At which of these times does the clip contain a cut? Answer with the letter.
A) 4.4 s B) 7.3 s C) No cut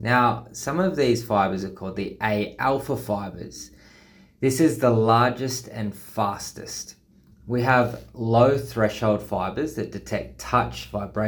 B